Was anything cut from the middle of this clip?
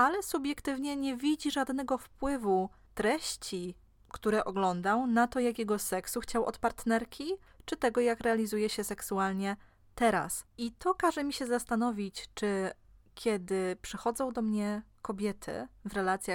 yes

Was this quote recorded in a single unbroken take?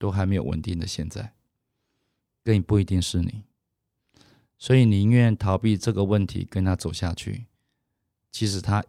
yes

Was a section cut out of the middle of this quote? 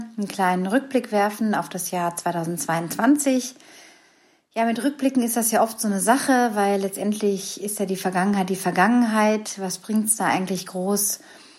no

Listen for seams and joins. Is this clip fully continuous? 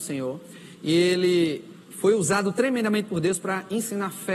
no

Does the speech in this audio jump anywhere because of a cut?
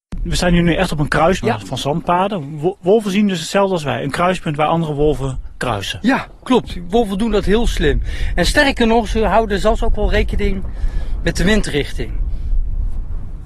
yes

